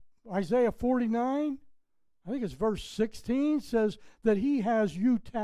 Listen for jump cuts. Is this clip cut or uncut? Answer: uncut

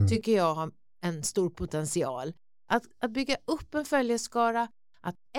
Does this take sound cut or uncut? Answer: cut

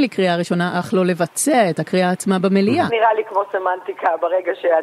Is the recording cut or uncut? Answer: cut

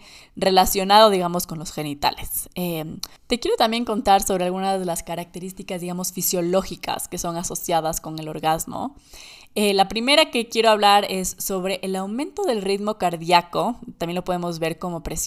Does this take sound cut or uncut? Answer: cut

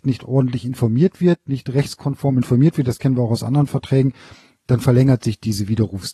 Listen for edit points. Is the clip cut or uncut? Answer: uncut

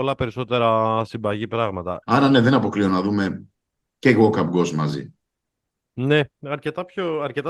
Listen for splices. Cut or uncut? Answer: cut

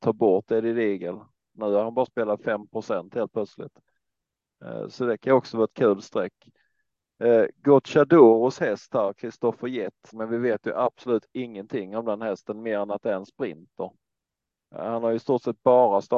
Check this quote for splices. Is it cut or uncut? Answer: cut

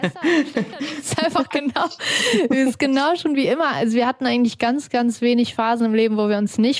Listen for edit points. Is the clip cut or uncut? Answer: uncut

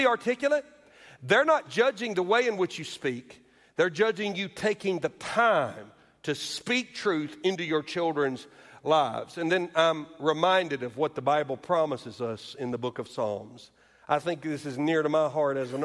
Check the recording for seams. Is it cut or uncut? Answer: uncut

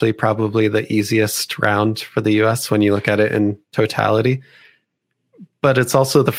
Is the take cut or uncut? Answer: uncut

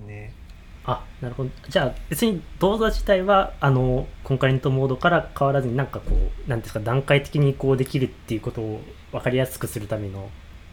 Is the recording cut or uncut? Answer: uncut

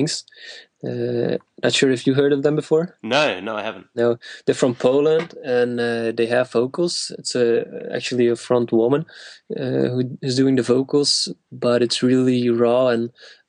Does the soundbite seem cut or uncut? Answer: uncut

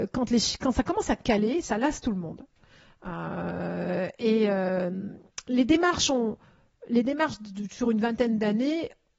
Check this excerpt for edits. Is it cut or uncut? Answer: uncut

